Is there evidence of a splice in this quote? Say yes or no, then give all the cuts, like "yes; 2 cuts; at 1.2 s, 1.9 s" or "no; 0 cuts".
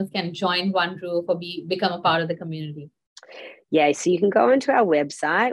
no; 0 cuts